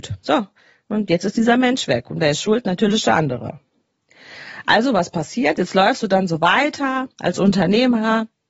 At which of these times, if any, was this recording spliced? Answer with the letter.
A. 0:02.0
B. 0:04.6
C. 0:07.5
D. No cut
D